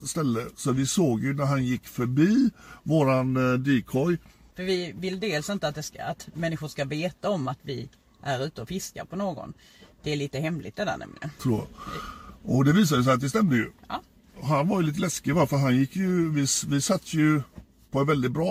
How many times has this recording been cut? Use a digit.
2